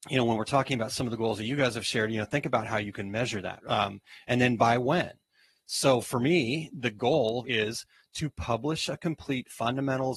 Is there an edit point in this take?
yes; 2 cuts; at 3.6 s, 7.4 s

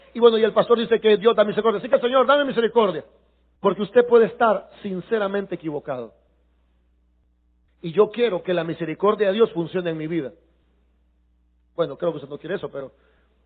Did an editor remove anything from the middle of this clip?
yes; 2 cuts; at 3.6 s, 7.7 s

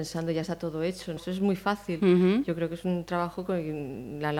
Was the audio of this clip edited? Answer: yes; 1 cut; at 1.2 s

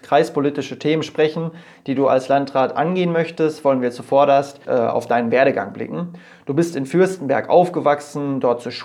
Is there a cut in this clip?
yes; 1 cut; at 4.7 s

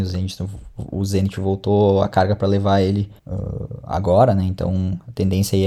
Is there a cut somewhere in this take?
yes; 1 cut; at 3.2 s

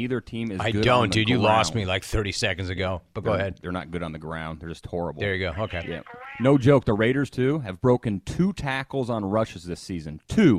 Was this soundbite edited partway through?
no; 0 cuts

